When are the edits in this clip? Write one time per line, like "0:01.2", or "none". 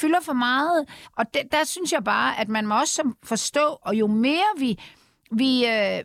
0:01.0
0:03.8